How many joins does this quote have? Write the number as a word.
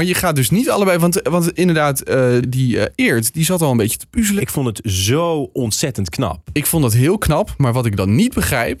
two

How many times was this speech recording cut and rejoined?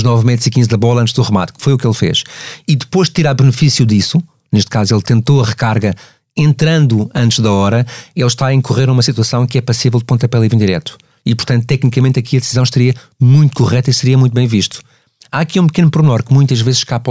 zero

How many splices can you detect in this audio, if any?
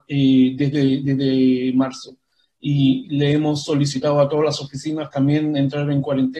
zero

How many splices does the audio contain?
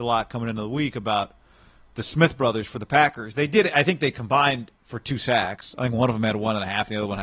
one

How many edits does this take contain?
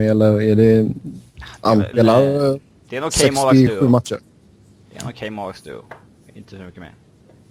one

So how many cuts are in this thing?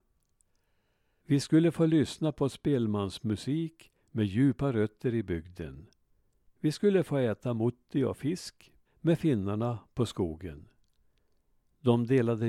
three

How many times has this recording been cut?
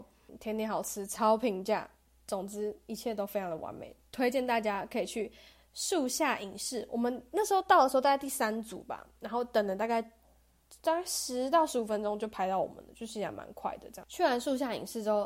zero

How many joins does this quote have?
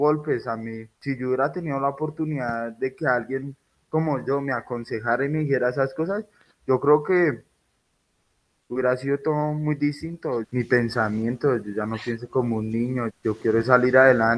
three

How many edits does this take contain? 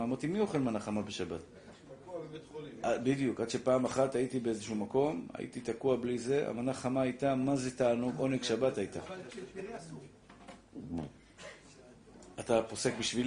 zero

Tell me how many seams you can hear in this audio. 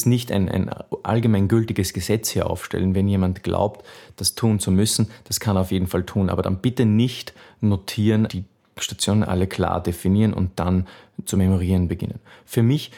one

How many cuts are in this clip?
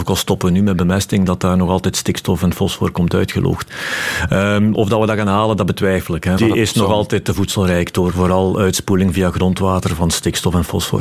two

